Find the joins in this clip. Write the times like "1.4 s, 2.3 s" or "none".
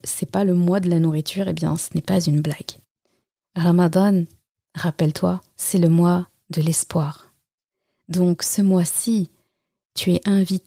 none